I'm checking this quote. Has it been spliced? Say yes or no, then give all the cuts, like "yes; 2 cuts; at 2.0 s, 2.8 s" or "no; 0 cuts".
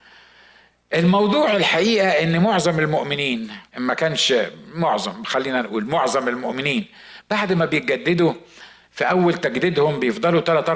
yes; 1 cut; at 3.7 s